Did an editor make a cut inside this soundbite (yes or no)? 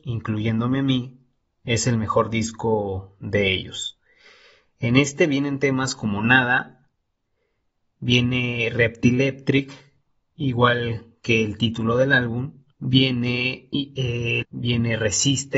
yes